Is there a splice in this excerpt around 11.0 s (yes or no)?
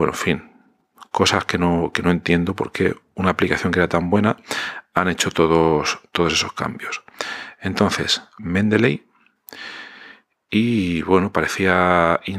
no